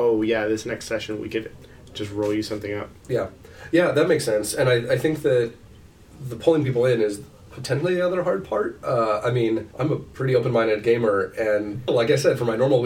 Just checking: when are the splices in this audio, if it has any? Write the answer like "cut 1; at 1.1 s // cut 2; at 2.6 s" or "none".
cut 1; at 9.7 s // cut 2; at 11.9 s